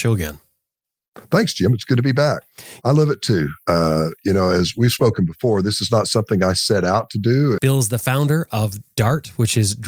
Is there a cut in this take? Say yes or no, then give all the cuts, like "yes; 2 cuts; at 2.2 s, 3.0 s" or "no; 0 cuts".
yes; 2 cuts; at 2.8 s, 7.6 s